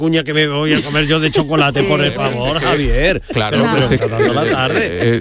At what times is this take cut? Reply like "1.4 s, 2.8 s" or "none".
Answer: 4.0 s